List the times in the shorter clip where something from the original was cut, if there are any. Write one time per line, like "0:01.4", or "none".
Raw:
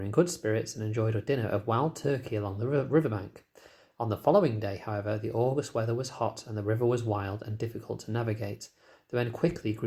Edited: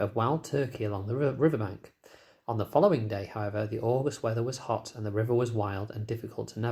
none